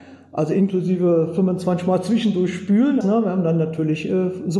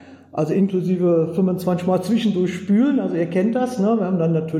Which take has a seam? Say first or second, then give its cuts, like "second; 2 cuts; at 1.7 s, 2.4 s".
first; 1 cut; at 3.0 s